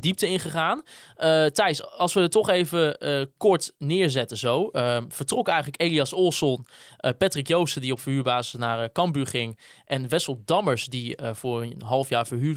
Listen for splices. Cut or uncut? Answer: uncut